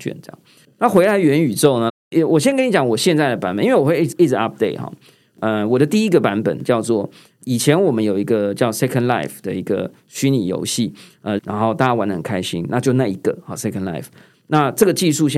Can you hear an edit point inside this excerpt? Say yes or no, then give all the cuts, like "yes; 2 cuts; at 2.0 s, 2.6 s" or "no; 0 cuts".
yes; 2 cuts; at 1.9 s, 11.4 s